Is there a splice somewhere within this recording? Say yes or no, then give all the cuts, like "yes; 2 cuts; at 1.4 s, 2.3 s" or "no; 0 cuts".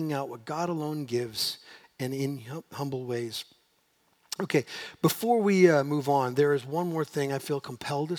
no; 0 cuts